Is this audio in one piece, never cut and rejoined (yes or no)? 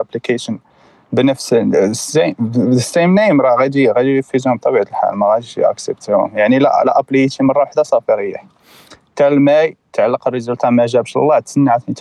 yes